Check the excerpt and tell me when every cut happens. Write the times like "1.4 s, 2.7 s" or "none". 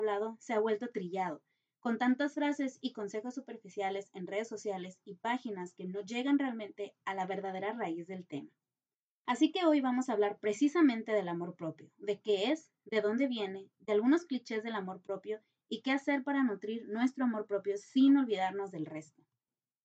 none